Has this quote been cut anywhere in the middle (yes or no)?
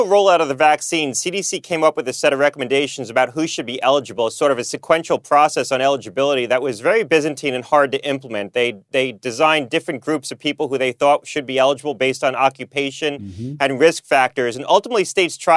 no